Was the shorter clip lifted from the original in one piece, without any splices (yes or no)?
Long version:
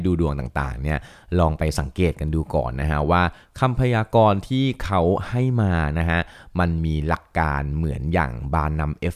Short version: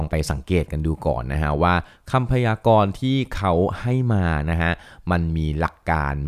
yes